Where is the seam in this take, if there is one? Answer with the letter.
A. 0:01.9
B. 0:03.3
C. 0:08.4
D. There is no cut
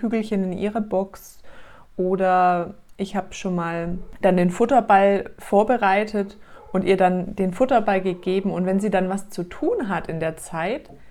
D